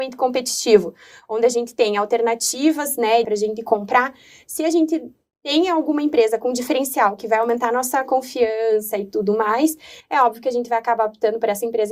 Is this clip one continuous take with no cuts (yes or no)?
no